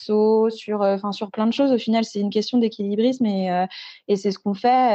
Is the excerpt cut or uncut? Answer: uncut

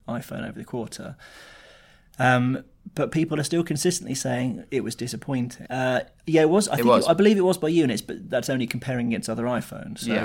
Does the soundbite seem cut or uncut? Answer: cut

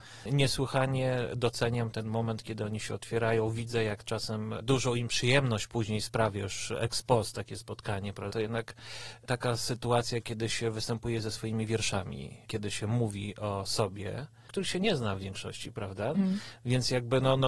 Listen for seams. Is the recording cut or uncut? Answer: cut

